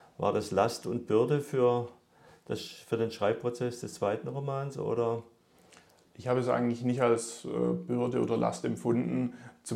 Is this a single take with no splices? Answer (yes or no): yes